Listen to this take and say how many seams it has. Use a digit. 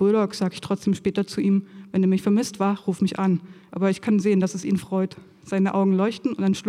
1